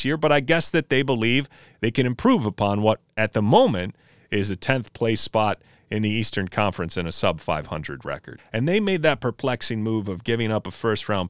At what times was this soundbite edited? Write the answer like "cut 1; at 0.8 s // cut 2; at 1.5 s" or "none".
cut 1; at 1.7 s // cut 2; at 8.4 s